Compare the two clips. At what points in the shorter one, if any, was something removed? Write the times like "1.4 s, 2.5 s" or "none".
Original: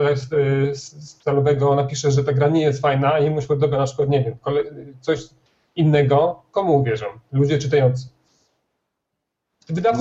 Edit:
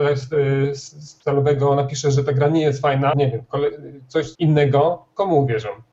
3.1 s, 4.3 s